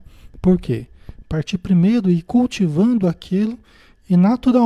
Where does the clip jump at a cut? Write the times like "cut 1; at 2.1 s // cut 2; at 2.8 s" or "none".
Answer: cut 1; at 1.2 s